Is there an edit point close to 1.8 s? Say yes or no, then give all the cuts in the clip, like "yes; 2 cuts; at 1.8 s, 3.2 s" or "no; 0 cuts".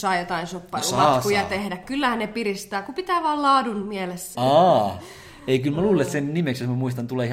no; 1 cut; at 4.3 s